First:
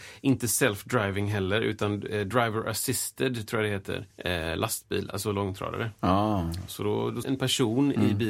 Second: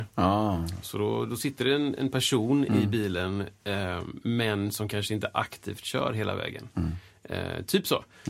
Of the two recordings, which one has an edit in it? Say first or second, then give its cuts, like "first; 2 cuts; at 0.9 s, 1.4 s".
first; 2 cuts; at 4.1 s, 7.2 s